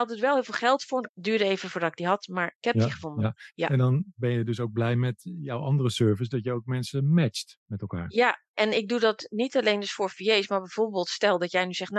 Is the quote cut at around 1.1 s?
yes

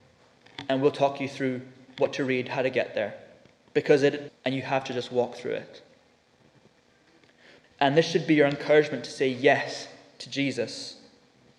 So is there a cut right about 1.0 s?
no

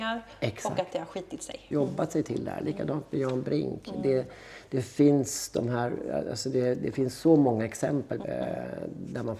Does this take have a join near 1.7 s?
yes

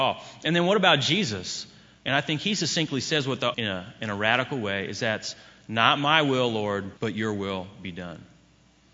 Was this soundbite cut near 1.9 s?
no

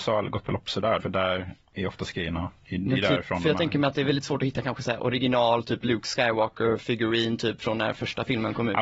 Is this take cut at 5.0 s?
no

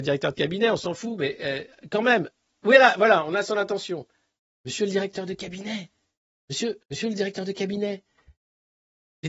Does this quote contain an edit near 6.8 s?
yes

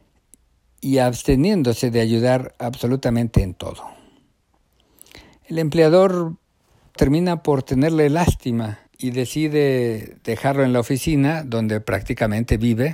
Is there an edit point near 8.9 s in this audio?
yes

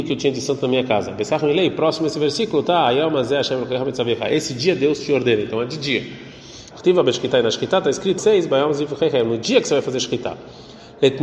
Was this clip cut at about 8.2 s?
yes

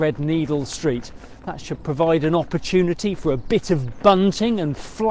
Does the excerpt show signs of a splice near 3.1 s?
no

